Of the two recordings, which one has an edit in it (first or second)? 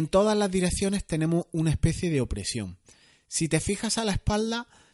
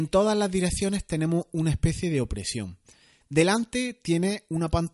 second